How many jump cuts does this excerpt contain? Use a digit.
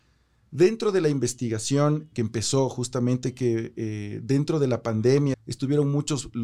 2